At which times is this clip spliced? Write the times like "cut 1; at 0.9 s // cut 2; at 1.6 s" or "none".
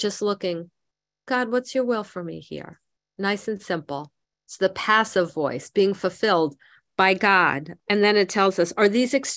cut 1; at 4.3 s // cut 2; at 7.8 s